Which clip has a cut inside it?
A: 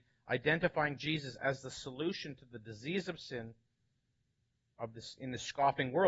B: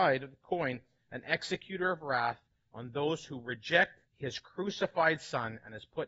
B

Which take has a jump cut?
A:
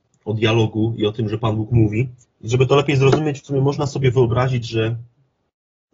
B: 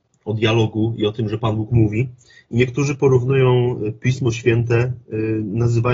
A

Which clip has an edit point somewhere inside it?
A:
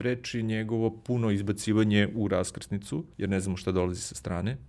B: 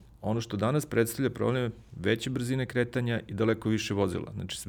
A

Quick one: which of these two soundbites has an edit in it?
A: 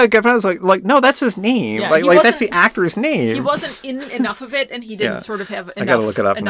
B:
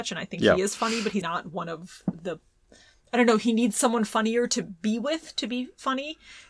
B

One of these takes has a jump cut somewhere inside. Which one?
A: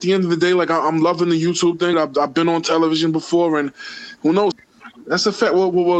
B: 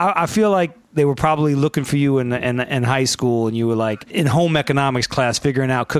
A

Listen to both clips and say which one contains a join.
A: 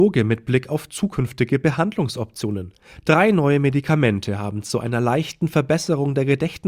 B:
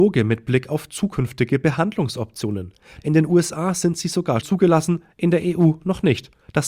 B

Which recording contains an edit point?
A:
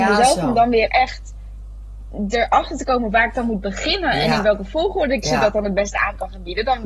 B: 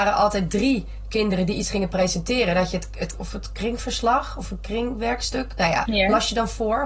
B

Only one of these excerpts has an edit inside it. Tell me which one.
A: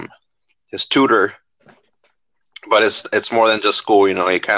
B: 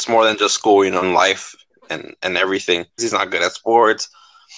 B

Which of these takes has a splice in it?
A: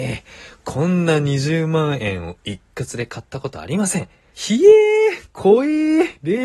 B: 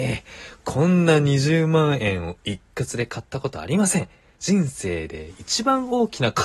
A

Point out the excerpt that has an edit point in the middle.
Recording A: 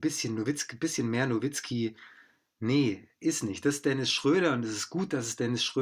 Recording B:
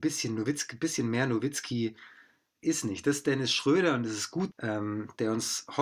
B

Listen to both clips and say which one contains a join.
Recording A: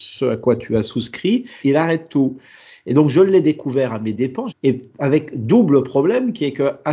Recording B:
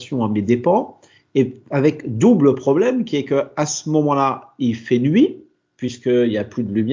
A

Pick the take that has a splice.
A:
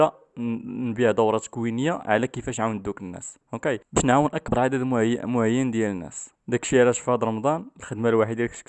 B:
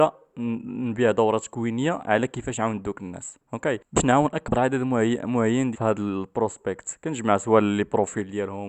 B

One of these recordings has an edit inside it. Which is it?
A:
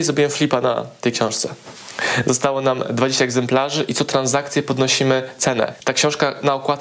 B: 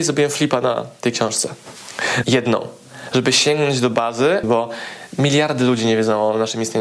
B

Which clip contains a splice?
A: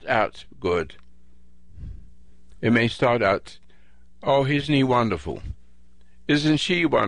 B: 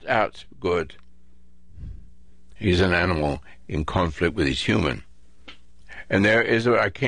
B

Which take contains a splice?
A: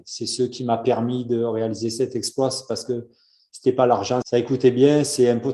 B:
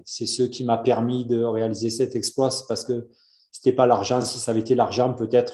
A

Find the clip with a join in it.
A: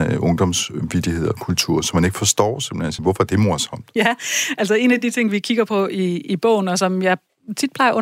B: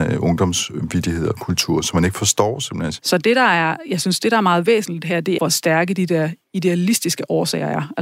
B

